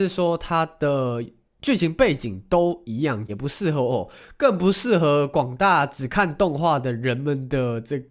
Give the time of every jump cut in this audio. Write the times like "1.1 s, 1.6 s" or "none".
3.3 s

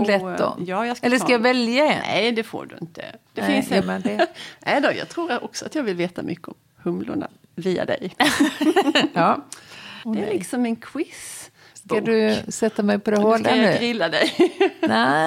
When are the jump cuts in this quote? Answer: 3.8 s, 10.0 s

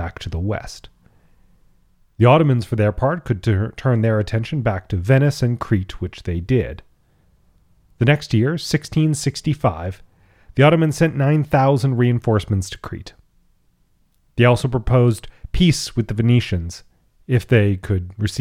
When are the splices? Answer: none

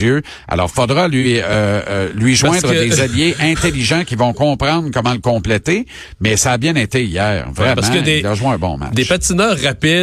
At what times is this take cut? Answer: none

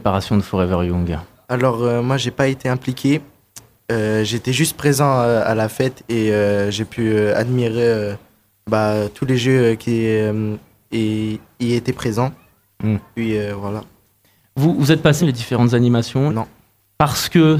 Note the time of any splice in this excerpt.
15.2 s, 16.3 s

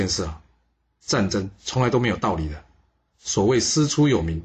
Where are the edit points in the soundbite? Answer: none

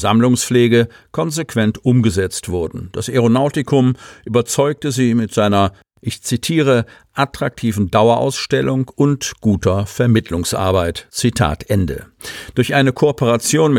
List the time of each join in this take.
none

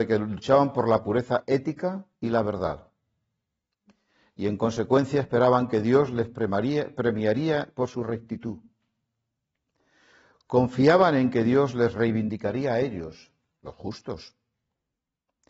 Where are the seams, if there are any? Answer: 2.2 s

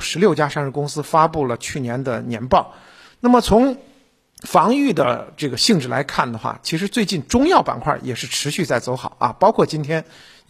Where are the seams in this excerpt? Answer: 3.1 s

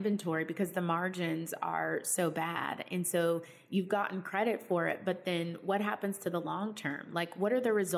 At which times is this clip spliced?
none

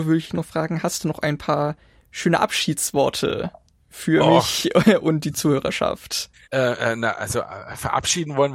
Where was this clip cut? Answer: 6.5 s

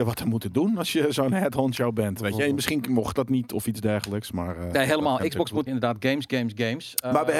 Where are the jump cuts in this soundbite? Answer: 5.7 s

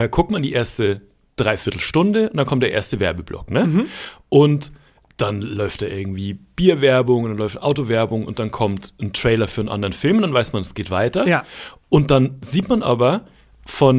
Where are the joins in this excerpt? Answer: none

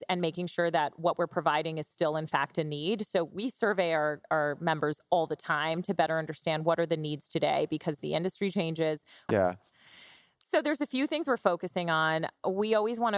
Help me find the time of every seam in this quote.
9.3 s

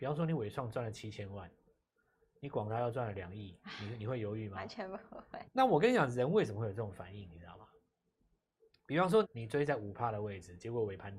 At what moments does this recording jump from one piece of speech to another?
5.4 s, 9.2 s

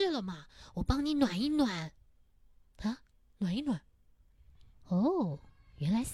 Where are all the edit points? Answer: 4.7 s

